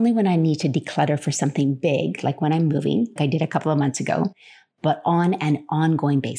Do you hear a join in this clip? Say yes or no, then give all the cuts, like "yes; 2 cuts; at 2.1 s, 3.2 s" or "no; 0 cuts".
yes; 1 cut; at 3.2 s